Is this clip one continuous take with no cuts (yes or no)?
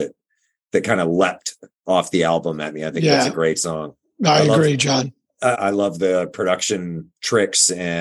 no